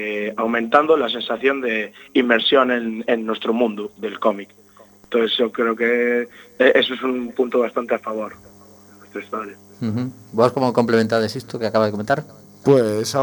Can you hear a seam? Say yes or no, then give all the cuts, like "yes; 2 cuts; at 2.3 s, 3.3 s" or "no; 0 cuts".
no; 0 cuts